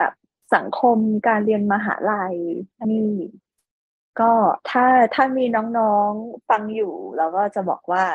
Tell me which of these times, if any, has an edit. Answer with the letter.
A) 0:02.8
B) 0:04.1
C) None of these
A